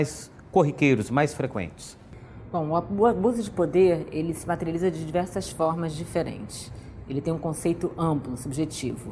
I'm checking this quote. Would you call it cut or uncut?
uncut